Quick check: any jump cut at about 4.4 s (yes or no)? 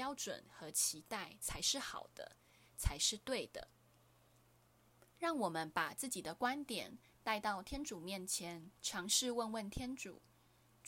yes